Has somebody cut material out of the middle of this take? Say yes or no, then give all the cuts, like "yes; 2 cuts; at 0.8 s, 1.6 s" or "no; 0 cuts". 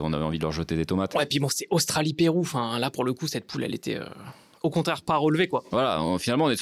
no; 0 cuts